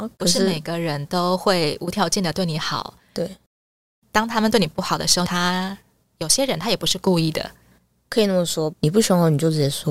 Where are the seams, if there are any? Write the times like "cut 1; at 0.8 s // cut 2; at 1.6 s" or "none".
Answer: cut 1; at 5.3 s // cut 2; at 8.7 s